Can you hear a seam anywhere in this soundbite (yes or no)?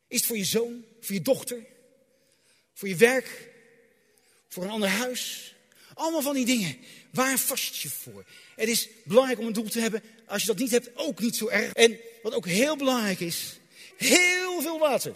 yes